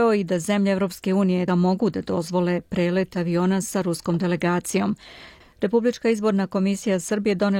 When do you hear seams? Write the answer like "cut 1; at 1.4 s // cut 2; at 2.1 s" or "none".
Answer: cut 1; at 1.5 s // cut 2; at 5.4 s